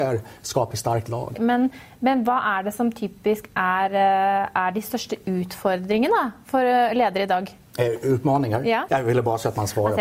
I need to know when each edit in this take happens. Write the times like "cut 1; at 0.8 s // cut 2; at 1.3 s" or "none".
cut 1; at 1.4 s // cut 2; at 8.9 s

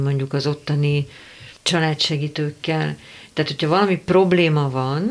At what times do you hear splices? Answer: cut 1; at 1.6 s

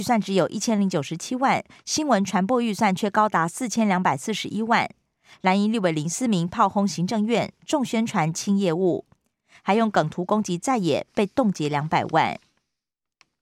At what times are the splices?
none

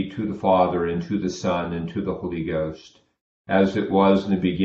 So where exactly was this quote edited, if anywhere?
none

